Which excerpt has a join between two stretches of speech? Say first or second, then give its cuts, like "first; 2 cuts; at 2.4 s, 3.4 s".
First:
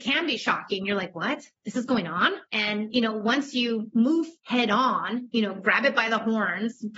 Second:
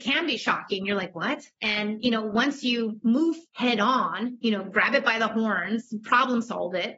second; 1 cut; at 1.6 s